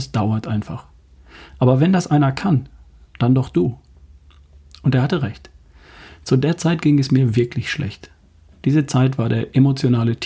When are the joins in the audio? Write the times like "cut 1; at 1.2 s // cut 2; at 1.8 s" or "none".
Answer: cut 1; at 3.1 s // cut 2; at 6.1 s